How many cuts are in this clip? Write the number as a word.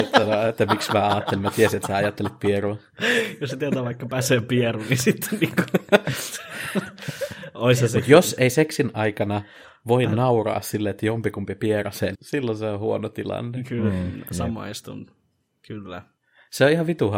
one